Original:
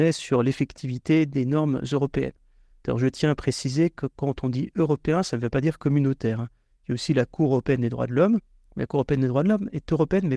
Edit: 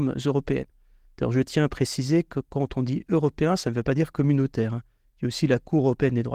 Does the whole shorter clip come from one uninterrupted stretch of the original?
yes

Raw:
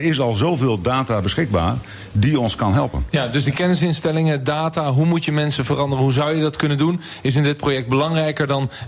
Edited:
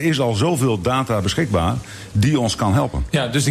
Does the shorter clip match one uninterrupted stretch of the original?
yes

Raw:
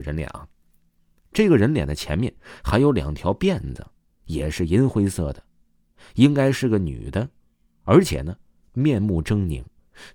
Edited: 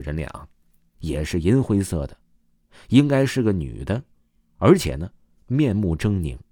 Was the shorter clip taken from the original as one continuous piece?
no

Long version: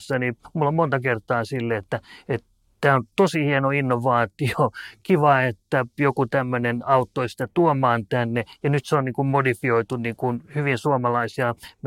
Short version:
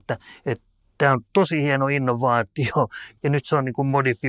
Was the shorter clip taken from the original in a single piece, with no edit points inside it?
no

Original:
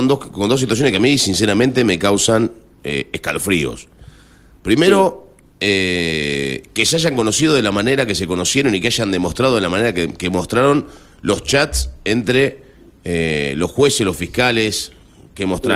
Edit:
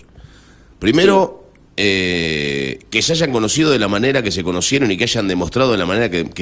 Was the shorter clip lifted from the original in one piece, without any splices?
yes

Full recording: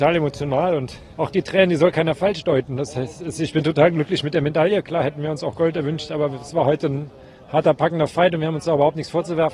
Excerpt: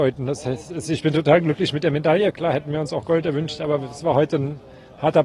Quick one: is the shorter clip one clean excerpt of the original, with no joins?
yes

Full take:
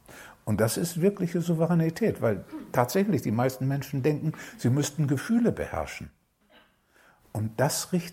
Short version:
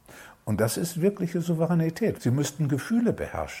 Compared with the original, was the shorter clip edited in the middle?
yes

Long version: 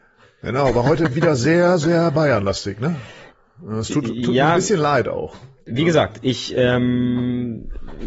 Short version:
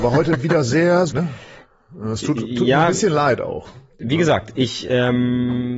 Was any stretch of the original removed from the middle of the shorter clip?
yes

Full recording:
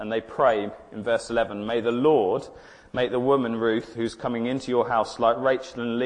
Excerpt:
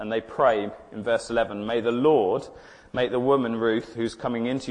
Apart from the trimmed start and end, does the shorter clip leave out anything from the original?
no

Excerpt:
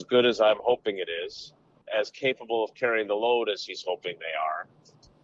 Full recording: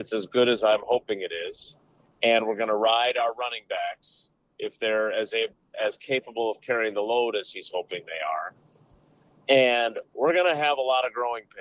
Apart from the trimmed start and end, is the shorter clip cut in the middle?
yes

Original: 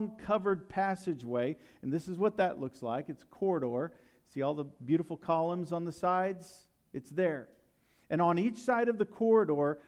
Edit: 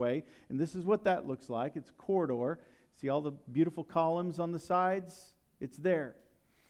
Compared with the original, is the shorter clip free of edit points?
yes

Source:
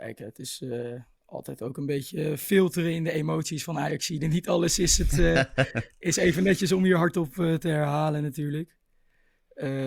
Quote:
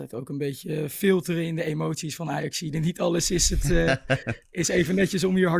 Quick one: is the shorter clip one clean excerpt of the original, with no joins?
yes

